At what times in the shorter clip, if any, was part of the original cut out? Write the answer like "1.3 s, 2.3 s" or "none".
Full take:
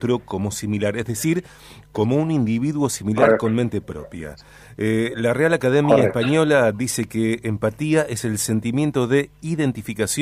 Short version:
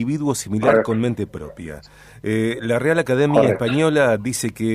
none